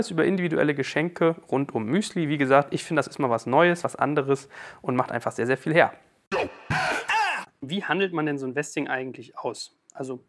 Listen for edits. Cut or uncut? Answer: uncut